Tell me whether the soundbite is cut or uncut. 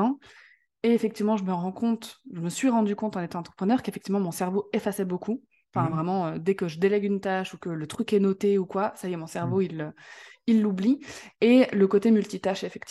uncut